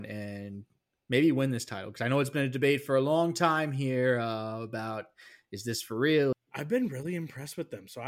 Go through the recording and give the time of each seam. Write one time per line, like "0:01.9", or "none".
0:06.3